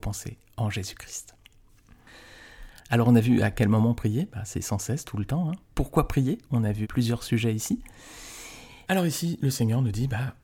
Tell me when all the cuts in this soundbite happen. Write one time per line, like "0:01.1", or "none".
0:06.8
0:08.9